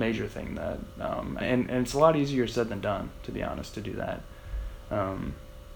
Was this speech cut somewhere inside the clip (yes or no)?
yes